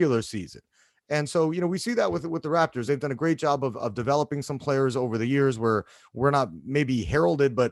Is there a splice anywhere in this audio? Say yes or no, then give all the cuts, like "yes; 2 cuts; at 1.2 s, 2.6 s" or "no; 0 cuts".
no; 0 cuts